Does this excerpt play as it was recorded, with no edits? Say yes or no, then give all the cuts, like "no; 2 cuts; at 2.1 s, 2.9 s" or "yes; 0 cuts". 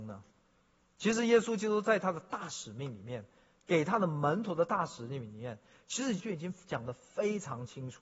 no; 1 cut; at 6.2 s